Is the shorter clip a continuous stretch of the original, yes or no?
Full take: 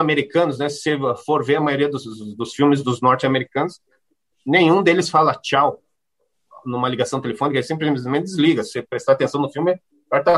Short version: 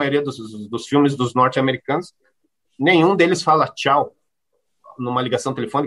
yes